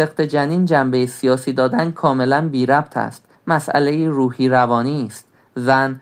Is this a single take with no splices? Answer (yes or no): no